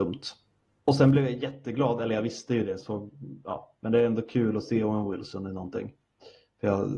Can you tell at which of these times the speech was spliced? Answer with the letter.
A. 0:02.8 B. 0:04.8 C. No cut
A